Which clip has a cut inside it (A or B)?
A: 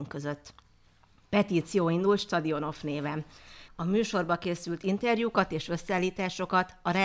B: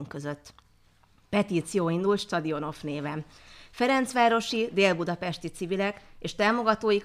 A